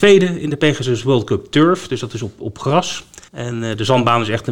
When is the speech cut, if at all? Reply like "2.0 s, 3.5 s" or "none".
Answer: 3.3 s